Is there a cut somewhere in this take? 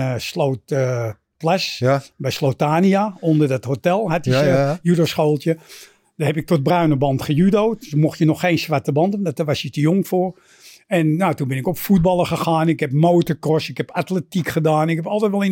no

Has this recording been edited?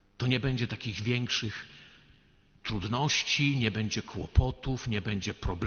no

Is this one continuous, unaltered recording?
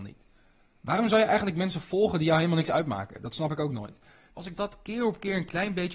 no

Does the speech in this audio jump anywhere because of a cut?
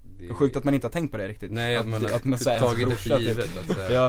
no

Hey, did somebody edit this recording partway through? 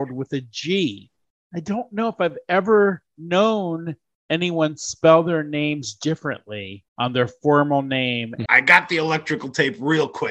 yes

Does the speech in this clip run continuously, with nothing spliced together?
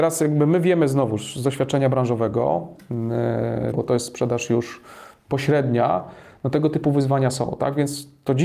no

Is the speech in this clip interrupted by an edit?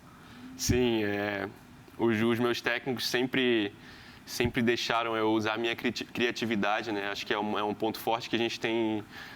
no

